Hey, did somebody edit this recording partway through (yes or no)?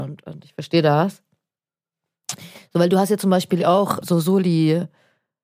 yes